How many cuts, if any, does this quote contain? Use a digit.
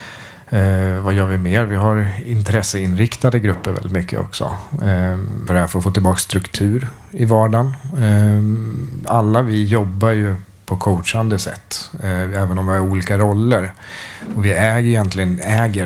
2